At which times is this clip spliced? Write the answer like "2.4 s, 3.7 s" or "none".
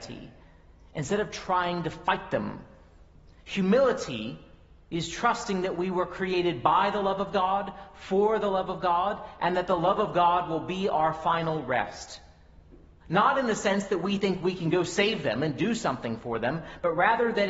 13.0 s